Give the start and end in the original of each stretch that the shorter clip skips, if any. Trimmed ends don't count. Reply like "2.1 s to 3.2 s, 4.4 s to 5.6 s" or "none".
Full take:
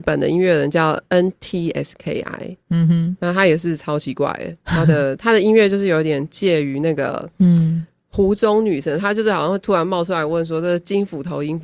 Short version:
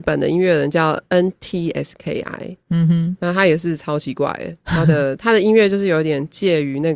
none